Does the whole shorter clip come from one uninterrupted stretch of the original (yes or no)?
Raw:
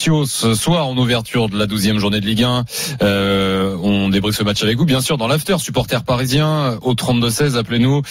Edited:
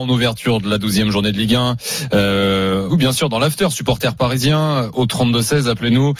no